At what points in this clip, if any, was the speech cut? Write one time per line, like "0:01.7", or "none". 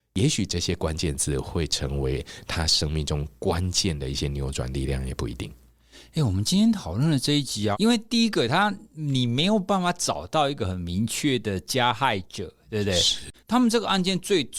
0:07.7
0:13.3